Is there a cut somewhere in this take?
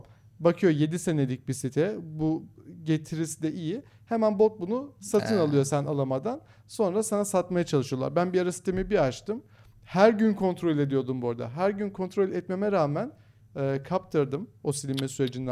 no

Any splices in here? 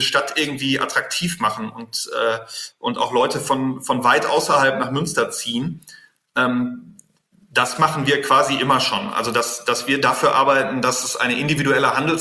no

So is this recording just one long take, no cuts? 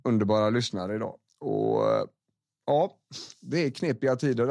yes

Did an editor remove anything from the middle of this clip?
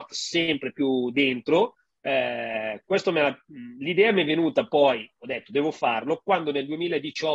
yes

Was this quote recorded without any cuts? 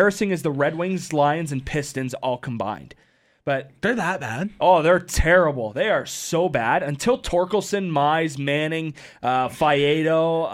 yes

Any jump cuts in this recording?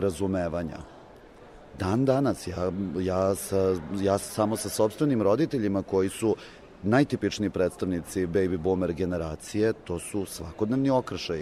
no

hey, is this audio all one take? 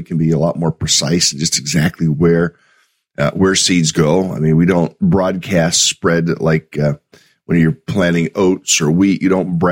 yes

